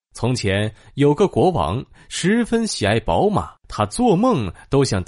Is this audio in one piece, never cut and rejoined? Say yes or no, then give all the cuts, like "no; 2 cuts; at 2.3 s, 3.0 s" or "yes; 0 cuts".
no; 1 cut; at 3.6 s